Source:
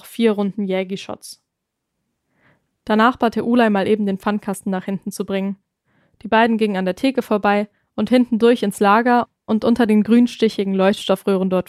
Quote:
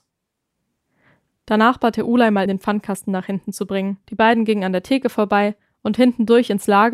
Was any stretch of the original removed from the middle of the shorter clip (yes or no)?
yes